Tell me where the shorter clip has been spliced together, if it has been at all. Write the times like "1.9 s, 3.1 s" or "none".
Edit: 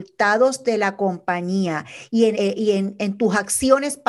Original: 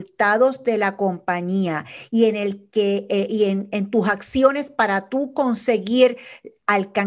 2.3 s

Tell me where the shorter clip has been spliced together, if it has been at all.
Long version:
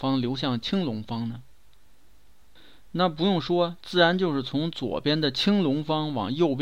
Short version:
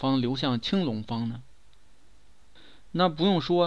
none

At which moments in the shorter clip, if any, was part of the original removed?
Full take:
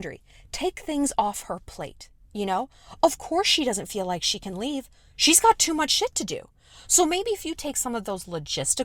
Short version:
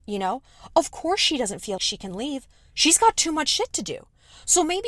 1.8 s

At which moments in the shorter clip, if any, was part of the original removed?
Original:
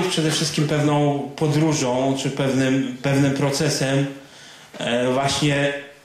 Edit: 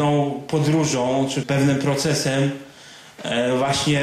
1.4 s

